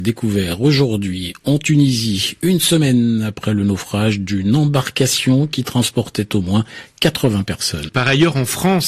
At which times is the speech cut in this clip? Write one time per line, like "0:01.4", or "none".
0:07.9